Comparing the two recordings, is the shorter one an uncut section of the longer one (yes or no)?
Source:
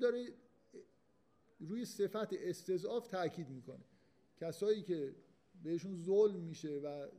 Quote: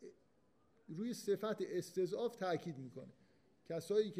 yes